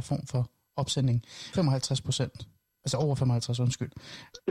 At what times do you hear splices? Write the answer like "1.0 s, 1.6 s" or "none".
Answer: 1.5 s